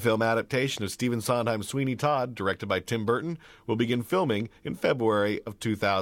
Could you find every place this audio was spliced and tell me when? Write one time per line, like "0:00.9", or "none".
none